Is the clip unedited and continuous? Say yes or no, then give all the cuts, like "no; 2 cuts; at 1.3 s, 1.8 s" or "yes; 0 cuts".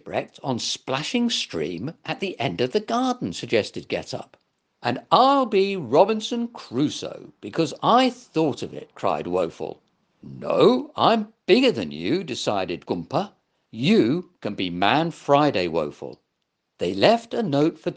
yes; 0 cuts